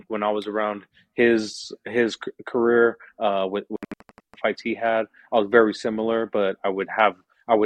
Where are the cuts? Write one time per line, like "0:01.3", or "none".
none